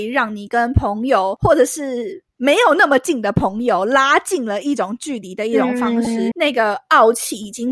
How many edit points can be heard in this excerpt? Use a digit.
1